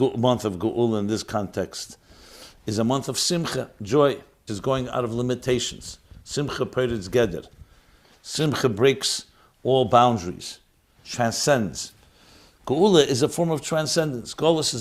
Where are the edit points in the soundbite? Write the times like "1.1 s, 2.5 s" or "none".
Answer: 4.5 s, 11.0 s